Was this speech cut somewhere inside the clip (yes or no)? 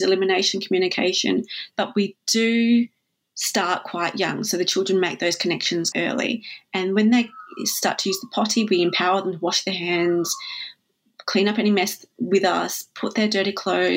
yes